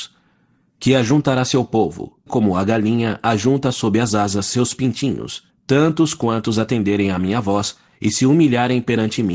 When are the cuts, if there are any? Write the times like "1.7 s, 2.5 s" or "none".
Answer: 2.3 s, 5.5 s